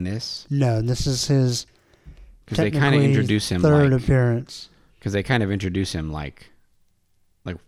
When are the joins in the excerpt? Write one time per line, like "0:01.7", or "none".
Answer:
none